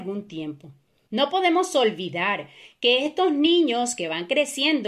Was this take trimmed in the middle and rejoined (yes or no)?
yes